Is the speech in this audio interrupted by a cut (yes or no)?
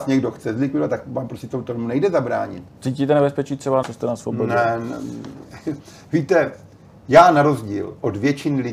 yes